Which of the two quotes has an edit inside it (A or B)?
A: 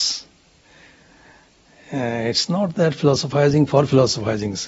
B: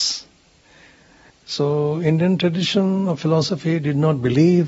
B